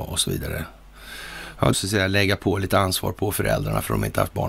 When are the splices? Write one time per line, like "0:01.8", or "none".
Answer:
0:01.7